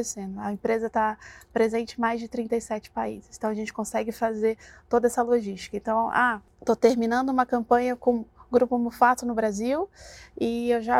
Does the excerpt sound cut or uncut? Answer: uncut